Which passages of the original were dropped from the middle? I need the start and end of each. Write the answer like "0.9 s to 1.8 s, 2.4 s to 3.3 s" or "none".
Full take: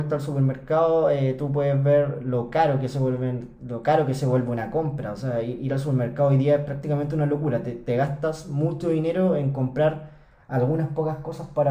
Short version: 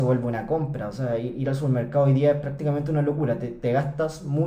none